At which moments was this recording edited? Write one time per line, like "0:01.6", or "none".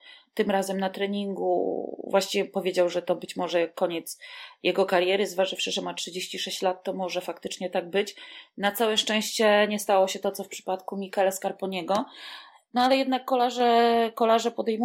none